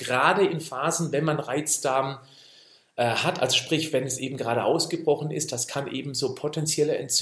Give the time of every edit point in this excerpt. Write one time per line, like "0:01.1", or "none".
none